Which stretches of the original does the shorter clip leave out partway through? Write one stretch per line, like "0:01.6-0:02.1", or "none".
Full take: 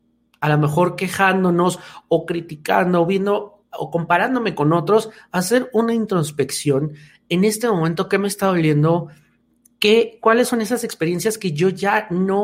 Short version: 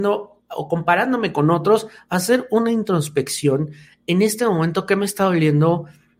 none